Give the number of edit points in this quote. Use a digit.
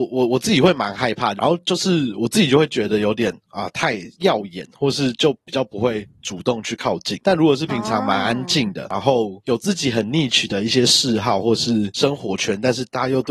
1